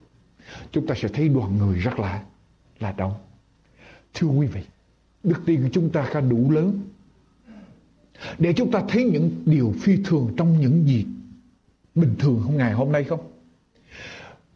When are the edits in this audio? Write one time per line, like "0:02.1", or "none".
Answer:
none